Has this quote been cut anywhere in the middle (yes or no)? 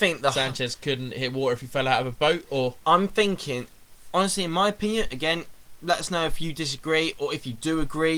no